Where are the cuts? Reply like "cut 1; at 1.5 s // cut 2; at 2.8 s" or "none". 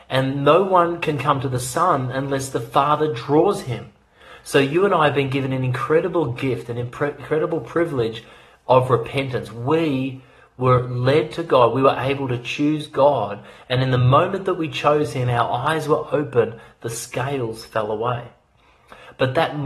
none